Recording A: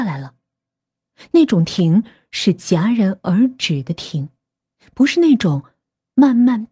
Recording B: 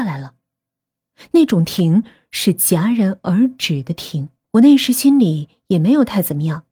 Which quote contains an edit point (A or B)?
B